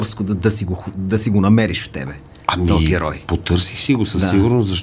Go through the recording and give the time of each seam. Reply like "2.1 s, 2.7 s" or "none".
none